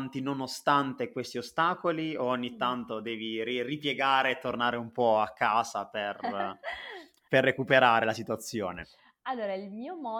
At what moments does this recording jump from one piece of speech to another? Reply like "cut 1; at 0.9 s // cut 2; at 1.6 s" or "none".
none

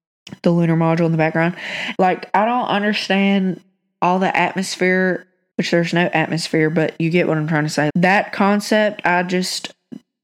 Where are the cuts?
cut 1; at 1.9 s // cut 2; at 5.5 s // cut 3; at 7.9 s

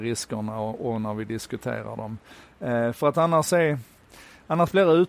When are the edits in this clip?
none

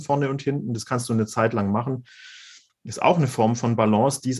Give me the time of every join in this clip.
cut 1; at 2.7 s

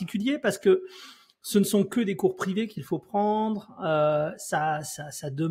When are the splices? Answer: none

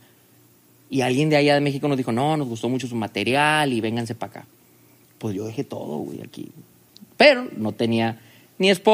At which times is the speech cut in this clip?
none

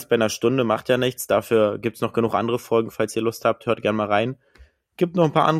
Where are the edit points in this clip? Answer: none

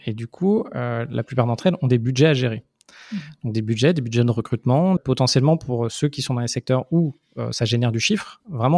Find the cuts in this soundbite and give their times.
cut 1; at 5.0 s

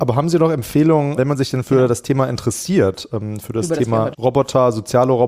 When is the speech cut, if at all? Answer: cut 1; at 1.2 s // cut 2; at 4.1 s

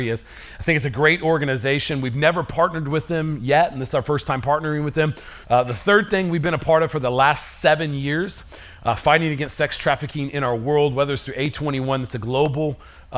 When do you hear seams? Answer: cut 1; at 5.4 s

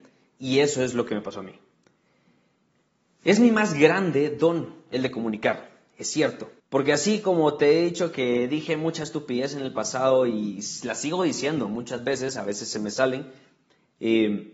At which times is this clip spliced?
cut 1; at 6.6 s

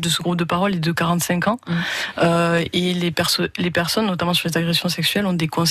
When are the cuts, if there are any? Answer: none

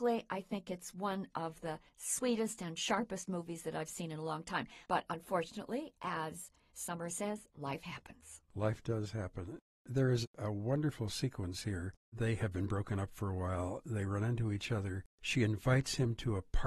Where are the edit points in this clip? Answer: cut 1; at 4.8 s

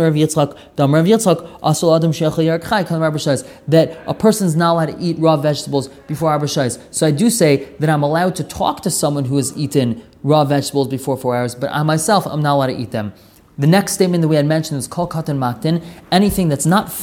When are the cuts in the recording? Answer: none

